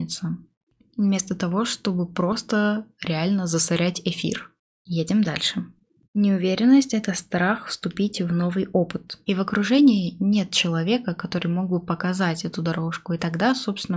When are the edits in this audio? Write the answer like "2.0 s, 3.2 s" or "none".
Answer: 6.0 s, 9.2 s